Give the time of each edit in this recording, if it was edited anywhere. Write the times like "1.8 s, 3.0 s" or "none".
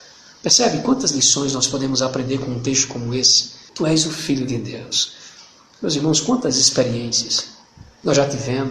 3.7 s